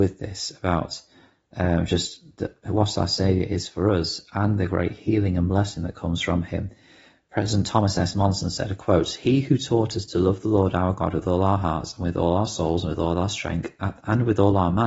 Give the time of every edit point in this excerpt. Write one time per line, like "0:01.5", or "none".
none